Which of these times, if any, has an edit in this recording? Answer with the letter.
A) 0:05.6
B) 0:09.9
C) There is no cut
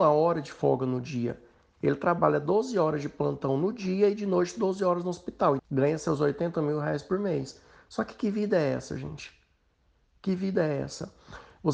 A